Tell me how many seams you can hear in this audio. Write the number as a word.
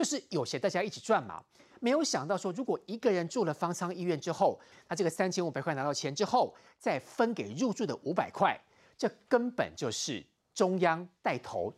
one